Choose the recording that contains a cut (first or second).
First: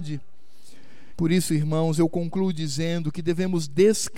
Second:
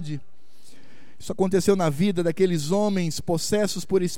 first